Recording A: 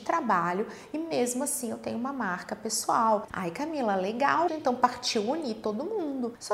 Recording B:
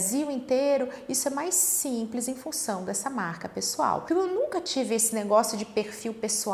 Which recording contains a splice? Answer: A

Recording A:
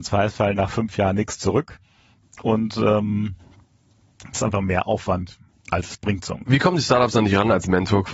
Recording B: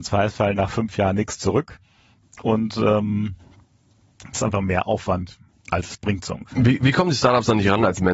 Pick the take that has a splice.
A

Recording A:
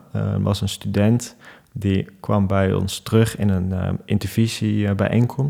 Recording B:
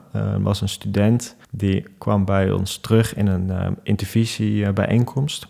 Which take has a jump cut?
B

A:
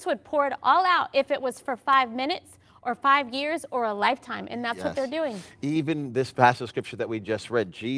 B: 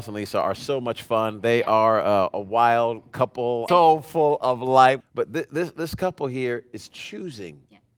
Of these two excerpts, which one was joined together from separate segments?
B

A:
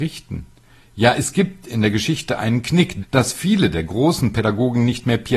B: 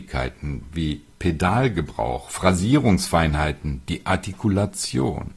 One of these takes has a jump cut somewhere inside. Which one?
A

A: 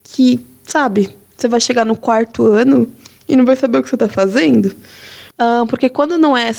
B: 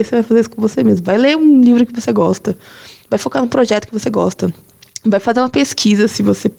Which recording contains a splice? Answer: A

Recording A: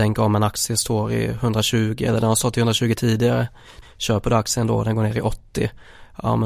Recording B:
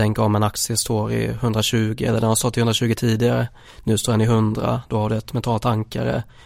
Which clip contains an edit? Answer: A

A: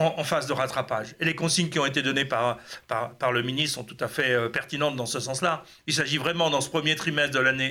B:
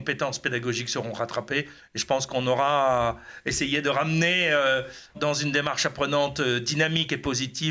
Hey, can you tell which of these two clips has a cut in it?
B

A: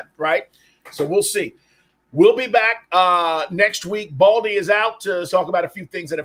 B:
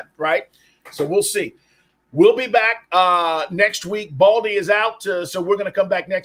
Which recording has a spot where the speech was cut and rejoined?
A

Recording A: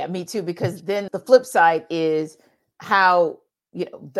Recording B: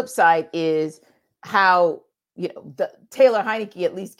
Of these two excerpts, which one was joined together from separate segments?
A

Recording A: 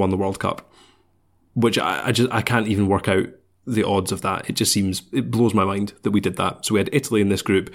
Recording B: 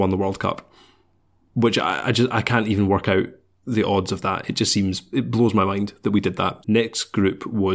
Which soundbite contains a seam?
B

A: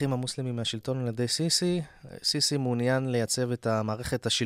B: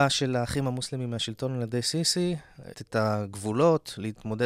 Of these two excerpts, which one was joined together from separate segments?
B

